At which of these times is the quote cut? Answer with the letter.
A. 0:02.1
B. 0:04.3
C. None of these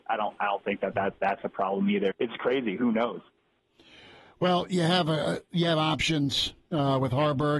A